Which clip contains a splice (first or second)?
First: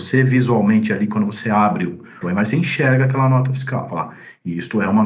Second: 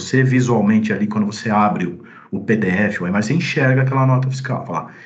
first